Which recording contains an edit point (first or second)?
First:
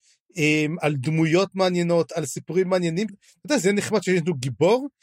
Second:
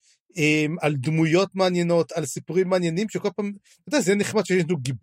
first